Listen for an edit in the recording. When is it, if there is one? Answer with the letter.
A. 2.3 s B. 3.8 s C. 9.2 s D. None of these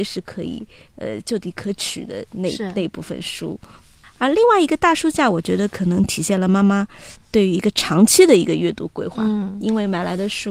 D